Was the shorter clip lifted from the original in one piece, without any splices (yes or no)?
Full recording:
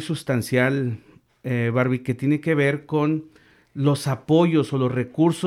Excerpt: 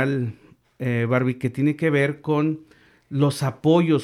yes